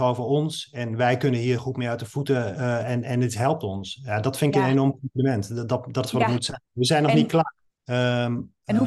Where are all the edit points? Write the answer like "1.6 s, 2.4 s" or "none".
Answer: 7.7 s